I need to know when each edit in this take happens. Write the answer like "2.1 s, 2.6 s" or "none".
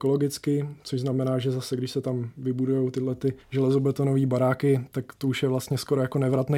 3.4 s

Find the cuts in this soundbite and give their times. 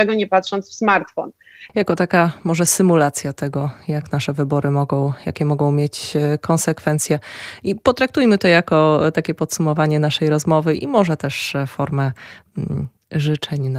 1.7 s

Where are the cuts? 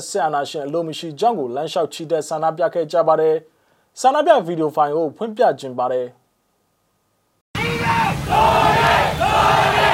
none

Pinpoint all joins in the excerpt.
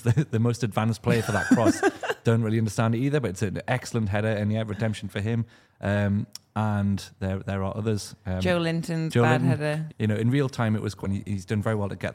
9.9 s, 11.0 s

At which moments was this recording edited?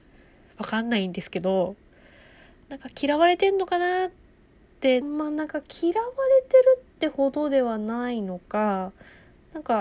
5.0 s

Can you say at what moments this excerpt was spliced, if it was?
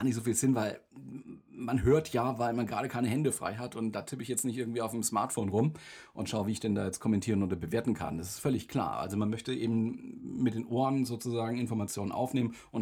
none

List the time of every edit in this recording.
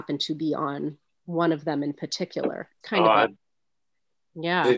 2.8 s

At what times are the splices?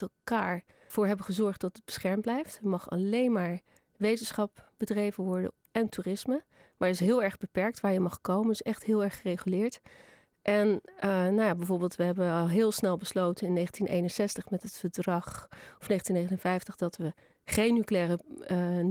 none

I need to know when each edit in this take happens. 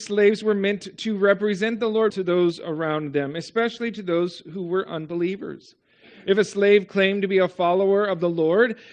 2.1 s

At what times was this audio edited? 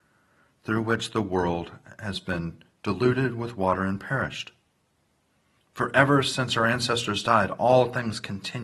5.6 s

